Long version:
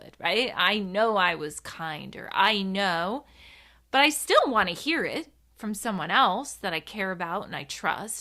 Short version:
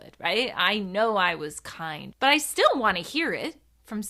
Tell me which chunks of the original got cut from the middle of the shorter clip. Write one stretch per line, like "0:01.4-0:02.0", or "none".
0:02.1-0:03.8